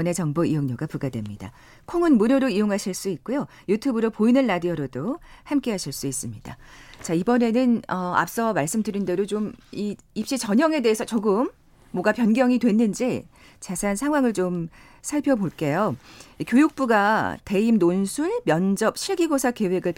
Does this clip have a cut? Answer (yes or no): no